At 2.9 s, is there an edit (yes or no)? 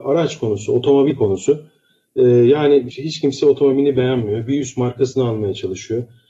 yes